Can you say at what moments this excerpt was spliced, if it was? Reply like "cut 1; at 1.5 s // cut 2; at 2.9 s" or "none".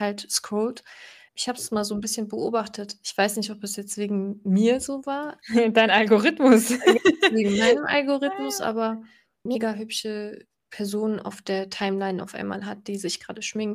cut 1; at 1.3 s